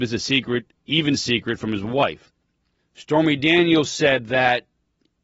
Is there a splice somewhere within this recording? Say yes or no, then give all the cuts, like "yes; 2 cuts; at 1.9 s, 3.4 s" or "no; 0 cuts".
yes; 1 cut; at 2.8 s